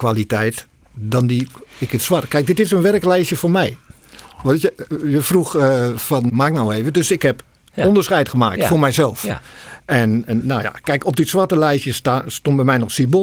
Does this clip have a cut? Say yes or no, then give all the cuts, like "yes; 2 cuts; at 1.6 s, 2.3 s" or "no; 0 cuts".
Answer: yes; 1 cut; at 6.3 s